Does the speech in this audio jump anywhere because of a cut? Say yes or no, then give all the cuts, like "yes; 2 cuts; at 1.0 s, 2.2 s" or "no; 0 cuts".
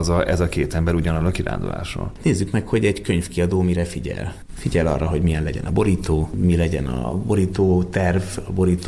no; 0 cuts